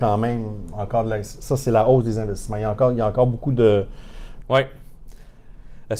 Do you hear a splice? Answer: yes; 1 cut; at 4.4 s

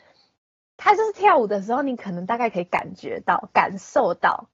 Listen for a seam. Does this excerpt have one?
no; 0 cuts

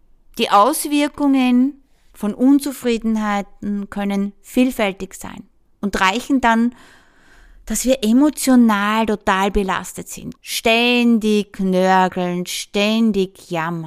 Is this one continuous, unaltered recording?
no; 1 cut; at 10.4 s

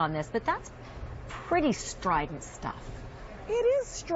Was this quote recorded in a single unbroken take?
yes; 0 cuts

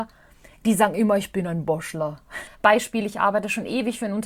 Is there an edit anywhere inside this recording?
yes; 1 cut; at 2.5 s

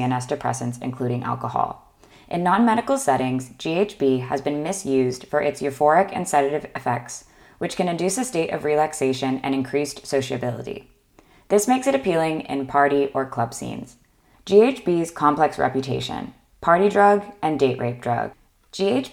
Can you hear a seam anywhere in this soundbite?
yes; 2 cuts; at 2.1 s, 14.3 s

